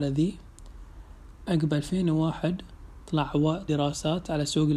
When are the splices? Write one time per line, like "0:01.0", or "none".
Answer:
0:03.7